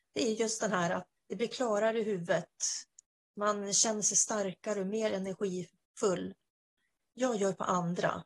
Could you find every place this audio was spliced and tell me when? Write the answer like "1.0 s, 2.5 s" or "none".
1.2 s, 7.0 s